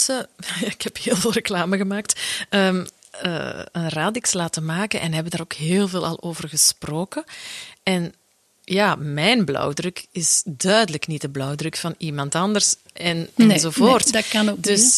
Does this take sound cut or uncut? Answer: uncut